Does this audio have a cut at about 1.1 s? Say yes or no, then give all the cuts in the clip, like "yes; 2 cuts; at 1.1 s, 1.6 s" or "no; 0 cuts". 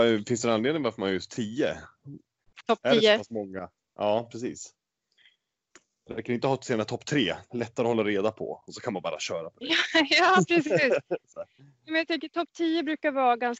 no; 1 cut; at 2.6 s